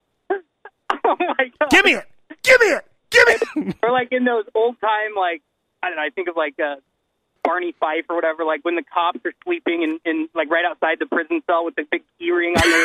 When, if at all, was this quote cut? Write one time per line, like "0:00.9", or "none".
none